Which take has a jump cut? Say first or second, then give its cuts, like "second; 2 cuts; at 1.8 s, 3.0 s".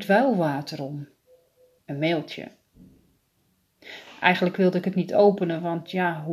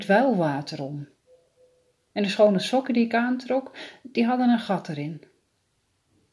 first; 1 cut; at 1.8 s